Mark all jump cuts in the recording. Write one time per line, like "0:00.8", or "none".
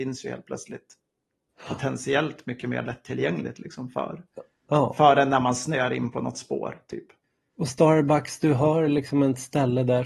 none